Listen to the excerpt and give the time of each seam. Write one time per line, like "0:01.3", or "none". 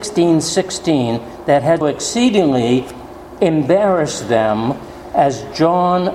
0:01.8